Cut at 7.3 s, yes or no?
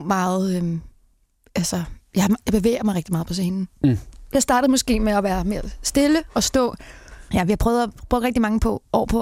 yes